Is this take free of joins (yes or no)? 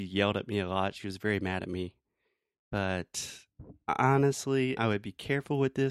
no